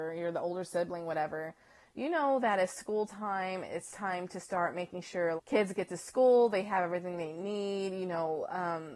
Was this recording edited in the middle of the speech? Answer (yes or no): yes